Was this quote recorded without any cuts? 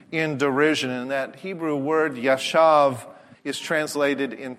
no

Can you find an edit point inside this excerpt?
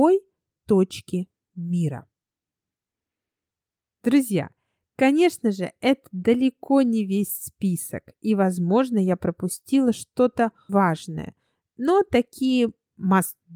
yes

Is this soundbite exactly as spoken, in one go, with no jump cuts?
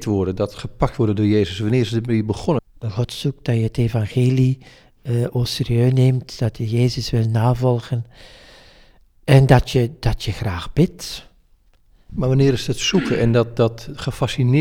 no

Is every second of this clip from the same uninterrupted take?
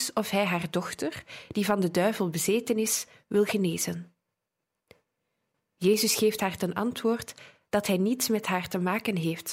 yes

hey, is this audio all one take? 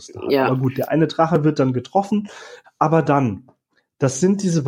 no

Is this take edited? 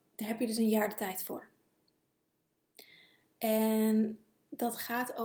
no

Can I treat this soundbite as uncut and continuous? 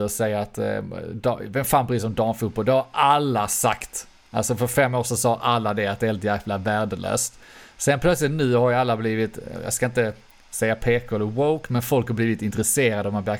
yes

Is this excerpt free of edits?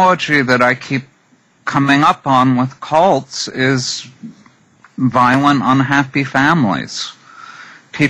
yes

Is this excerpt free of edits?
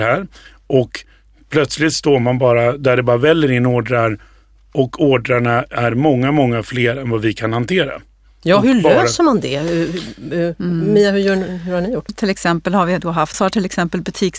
no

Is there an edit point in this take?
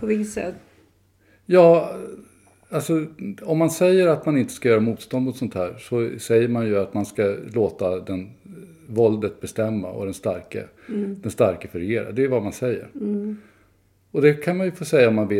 no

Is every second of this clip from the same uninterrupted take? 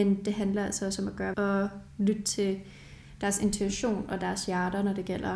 no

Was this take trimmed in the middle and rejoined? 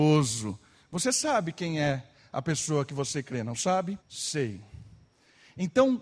yes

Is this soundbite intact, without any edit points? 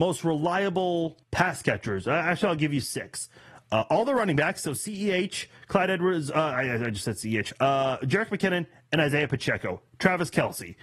no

